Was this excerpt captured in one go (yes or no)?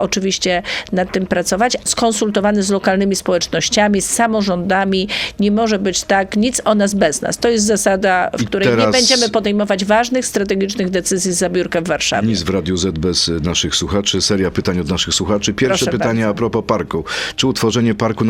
no